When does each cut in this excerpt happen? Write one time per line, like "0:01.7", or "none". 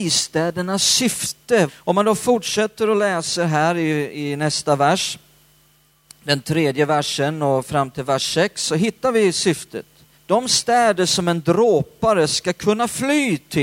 0:01.7
0:10.1